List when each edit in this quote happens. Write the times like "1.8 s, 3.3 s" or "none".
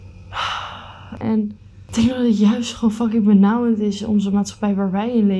1.2 s